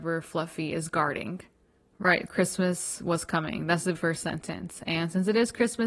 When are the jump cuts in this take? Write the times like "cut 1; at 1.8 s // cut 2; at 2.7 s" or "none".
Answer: cut 1; at 2.3 s // cut 2; at 3.9 s